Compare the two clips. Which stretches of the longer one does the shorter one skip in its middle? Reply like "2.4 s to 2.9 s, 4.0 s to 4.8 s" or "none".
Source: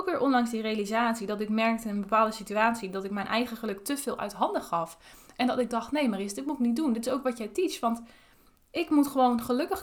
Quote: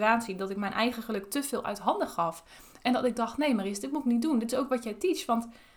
none